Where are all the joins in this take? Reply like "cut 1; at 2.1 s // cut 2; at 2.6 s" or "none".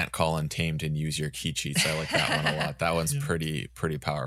none